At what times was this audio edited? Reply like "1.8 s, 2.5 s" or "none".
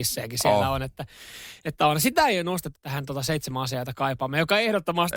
2.7 s